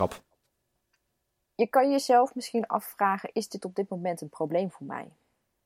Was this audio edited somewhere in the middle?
no; 0 cuts

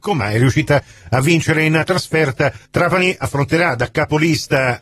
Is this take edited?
yes; 1 cut; at 2.7 s

